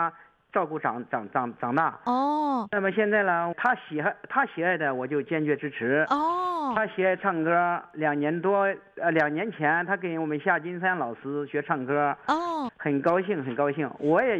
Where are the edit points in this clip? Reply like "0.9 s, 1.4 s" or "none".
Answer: 3.5 s, 12.7 s